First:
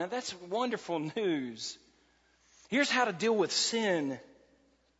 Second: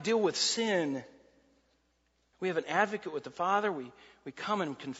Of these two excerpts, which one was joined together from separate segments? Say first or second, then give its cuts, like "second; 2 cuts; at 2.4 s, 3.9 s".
second; 1 cut; at 2.3 s